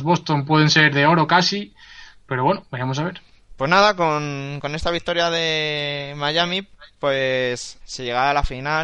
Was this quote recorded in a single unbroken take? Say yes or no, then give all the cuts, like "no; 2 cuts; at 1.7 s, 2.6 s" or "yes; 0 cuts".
no; 2 cuts; at 3.5 s, 7.8 s